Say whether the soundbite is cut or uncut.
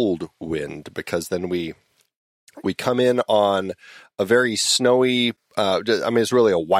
uncut